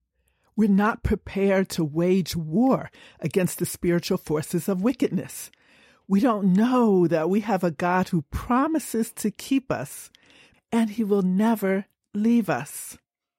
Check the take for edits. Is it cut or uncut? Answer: cut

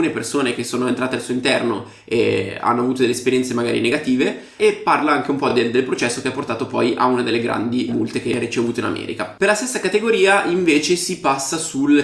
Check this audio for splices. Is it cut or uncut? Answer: uncut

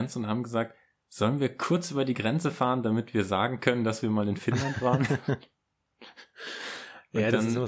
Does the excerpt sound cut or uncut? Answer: uncut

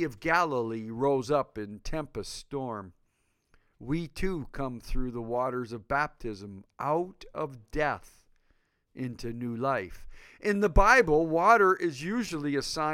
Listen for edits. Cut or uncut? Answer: uncut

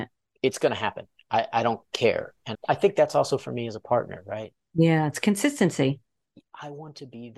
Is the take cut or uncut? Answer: cut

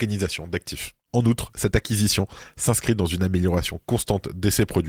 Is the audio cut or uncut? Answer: uncut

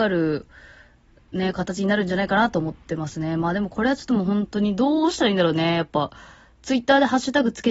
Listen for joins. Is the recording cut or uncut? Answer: uncut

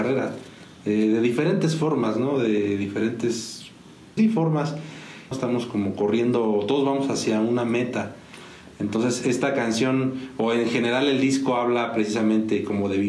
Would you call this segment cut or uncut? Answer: cut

